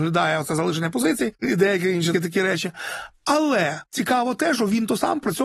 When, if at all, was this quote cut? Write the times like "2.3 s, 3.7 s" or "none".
2.1 s